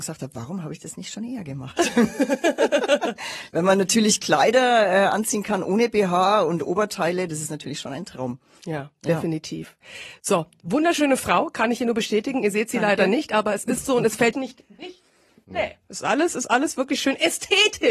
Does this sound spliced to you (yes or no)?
yes